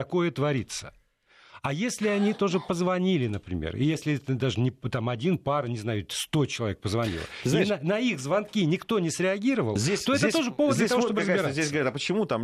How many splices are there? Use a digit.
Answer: 0